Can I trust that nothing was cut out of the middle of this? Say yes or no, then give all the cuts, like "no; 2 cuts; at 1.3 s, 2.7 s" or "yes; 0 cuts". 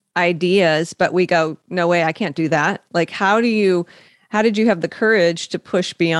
yes; 0 cuts